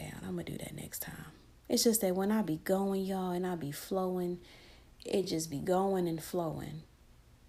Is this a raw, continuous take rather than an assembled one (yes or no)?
yes